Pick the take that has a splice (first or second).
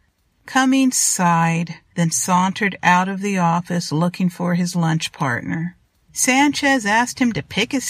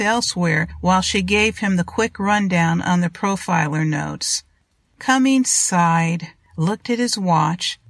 first